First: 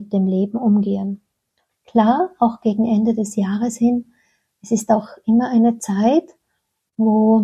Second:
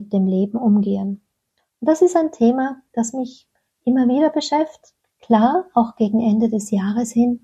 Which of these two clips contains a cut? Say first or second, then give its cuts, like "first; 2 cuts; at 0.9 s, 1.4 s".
first; 1 cut; at 1.7 s